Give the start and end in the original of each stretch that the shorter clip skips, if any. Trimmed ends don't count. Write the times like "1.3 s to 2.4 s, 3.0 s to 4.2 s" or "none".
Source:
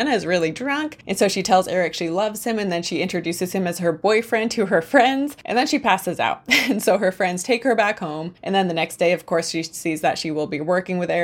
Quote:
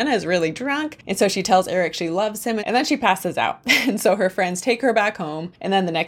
2.6 s to 5.4 s

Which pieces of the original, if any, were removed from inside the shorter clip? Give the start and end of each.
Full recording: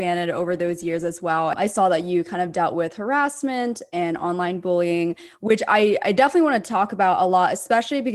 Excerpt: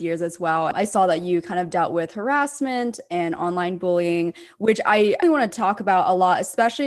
6.0 s to 6.3 s

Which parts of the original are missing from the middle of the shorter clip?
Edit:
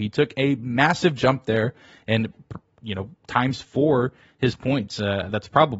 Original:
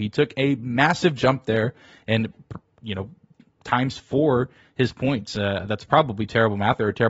3.2 s to 3.5 s

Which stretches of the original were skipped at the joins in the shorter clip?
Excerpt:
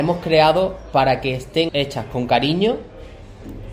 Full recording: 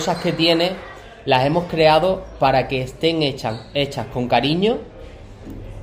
3.2 s to 3.7 s

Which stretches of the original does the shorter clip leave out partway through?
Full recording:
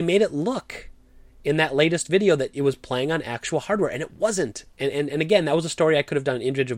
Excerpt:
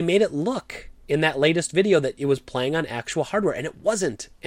1.0 s to 1.3 s

